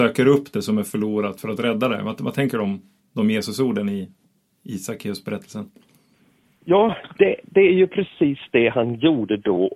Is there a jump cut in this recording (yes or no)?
no